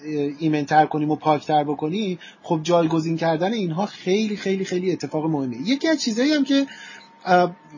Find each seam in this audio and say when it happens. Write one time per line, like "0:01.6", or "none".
none